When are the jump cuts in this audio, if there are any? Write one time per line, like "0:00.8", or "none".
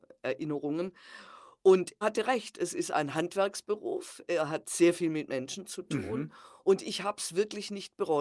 0:02.0